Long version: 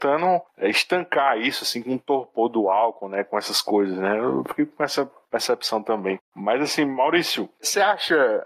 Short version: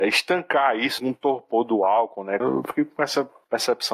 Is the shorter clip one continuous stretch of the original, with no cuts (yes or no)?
no